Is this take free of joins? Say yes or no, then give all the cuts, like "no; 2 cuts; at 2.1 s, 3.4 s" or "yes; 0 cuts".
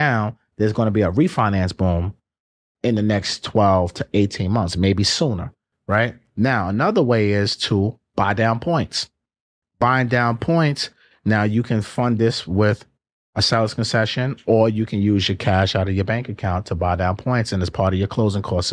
yes; 0 cuts